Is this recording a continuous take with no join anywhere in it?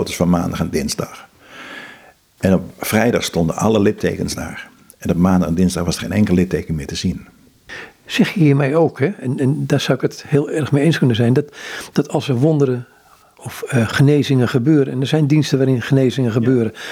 yes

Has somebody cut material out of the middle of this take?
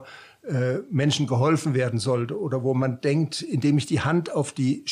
no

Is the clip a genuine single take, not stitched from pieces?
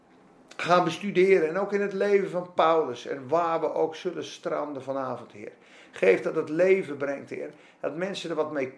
yes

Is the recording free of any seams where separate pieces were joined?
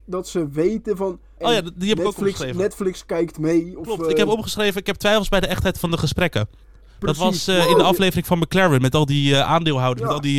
no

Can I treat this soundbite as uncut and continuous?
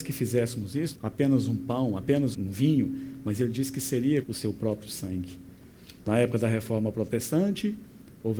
no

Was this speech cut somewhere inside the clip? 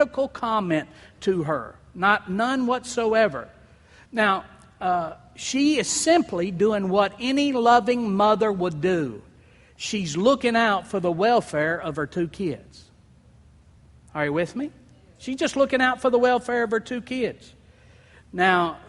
no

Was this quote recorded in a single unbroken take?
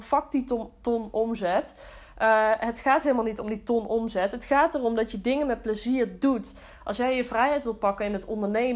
yes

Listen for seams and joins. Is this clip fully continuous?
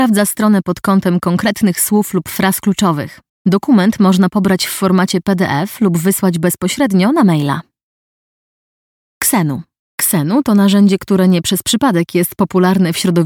no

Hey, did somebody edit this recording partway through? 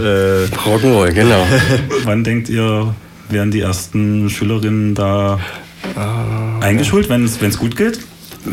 yes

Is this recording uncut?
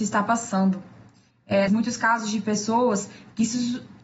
no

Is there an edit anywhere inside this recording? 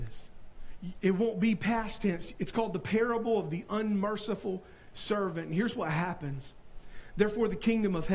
yes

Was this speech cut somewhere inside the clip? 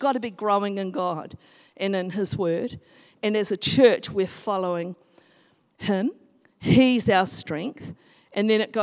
no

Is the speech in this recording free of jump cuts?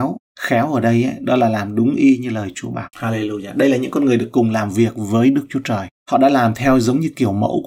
no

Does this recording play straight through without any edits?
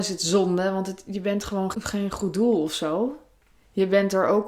no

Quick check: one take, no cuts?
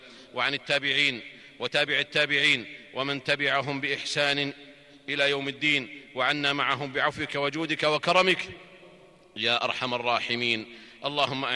yes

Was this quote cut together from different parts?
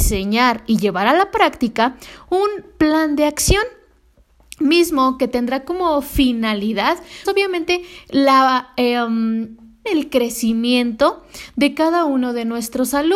yes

